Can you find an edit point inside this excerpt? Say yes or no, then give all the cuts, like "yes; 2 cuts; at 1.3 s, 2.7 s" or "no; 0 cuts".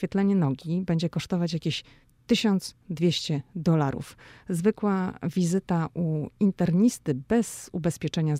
no; 0 cuts